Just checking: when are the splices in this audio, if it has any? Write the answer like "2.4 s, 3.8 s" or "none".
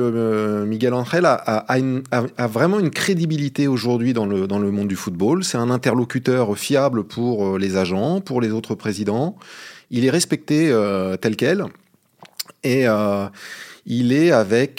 none